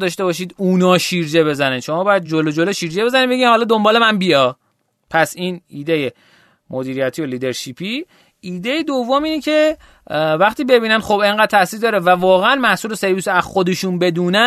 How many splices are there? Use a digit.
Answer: 0